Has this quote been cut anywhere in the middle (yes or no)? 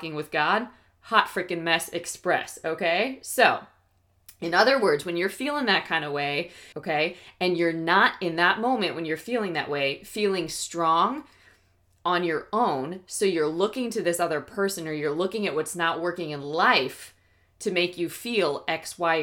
yes